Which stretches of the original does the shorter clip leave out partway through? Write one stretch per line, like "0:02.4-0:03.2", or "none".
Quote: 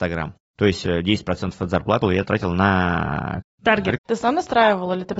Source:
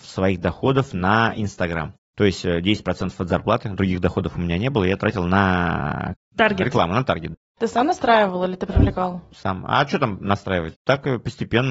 0:03.6-0:04.7
0:06.7-0:07.5